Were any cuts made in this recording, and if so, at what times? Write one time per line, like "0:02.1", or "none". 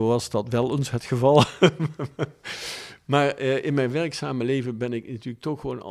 none